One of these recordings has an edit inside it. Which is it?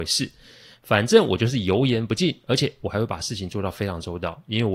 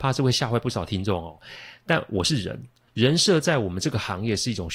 second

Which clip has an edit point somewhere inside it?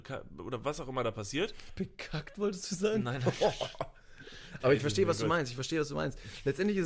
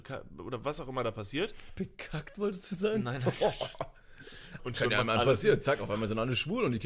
second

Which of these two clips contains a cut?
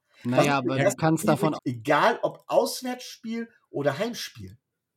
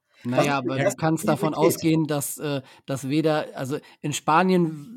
first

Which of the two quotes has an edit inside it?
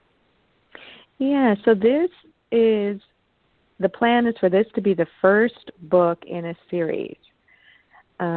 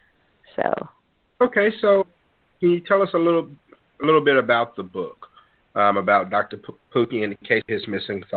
second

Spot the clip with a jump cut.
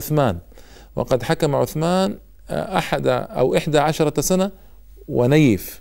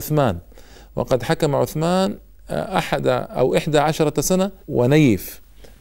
second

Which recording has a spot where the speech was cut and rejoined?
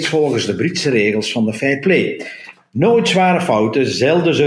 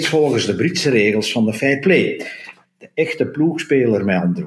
second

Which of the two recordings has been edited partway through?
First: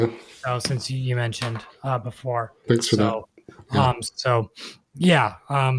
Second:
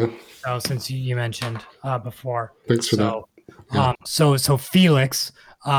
second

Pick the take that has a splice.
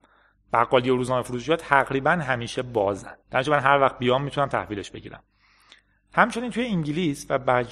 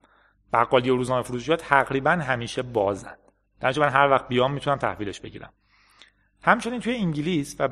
first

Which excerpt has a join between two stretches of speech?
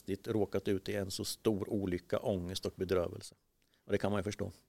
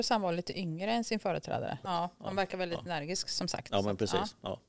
second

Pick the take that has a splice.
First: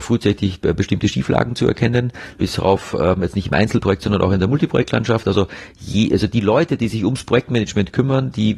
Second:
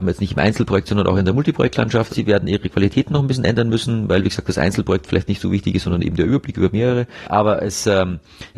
second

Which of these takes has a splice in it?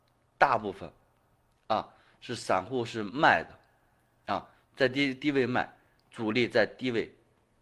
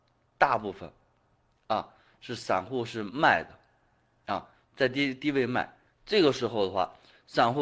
second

